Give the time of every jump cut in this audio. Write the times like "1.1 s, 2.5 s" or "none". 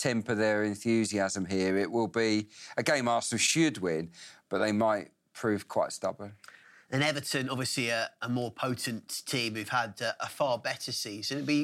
none

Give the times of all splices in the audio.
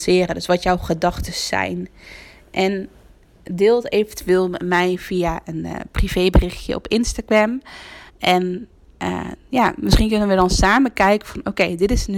8.1 s

